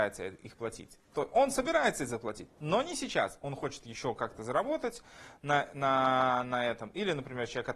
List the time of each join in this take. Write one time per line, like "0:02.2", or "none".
none